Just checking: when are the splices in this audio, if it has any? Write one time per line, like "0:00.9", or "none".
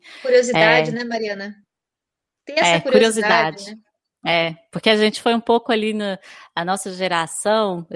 none